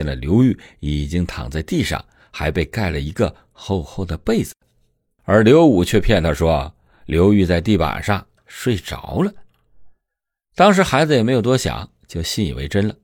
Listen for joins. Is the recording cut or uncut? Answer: uncut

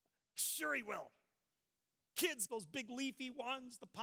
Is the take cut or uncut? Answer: cut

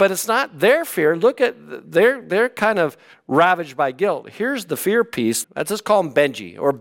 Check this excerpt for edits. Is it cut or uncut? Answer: cut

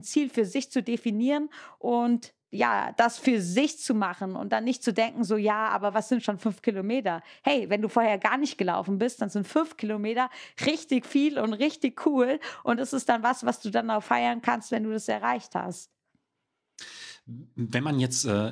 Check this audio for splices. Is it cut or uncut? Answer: uncut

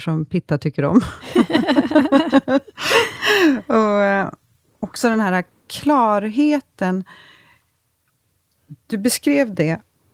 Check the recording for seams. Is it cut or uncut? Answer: uncut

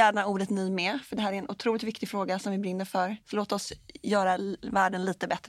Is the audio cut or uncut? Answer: cut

